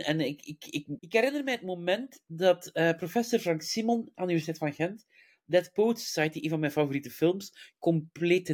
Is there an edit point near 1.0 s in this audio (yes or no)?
yes